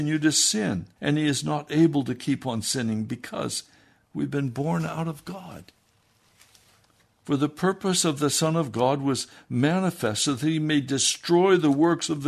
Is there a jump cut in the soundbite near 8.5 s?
no; 2 cuts; at 1.0 s, 7.2 s

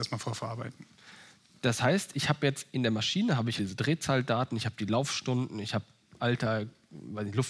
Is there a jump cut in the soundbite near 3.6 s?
yes; 1 cut; at 3.6 s

